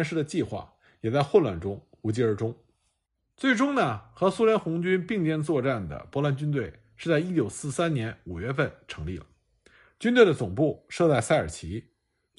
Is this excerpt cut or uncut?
uncut